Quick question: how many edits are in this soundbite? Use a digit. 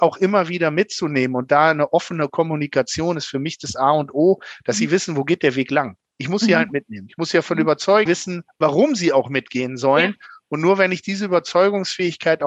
1